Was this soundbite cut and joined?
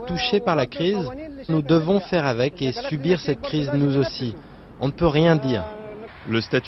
yes; 1 cut; at 1.5 s

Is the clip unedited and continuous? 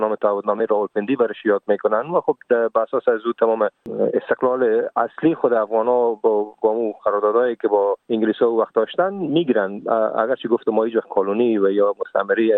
no; 1 cut; at 8.0 s

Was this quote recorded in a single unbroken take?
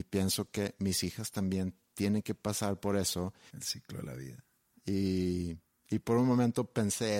no; 1 cut; at 3.5 s

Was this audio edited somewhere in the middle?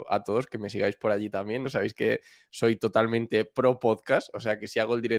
yes; 1 cut; at 1.6 s

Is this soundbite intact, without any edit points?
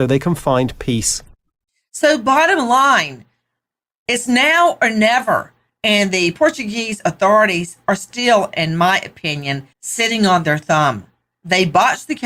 no; 1 cut; at 9.7 s

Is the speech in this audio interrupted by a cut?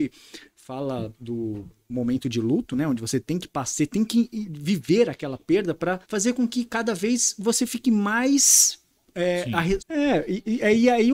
yes; 2 cuts; at 6.0 s, 9.8 s

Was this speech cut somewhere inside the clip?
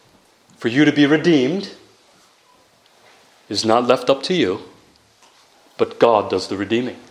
no; 0 cuts

